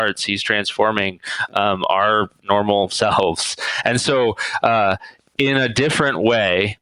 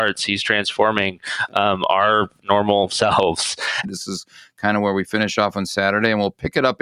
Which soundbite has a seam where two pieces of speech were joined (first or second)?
second